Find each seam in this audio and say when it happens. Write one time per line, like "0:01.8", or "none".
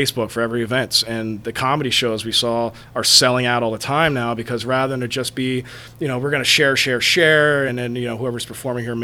none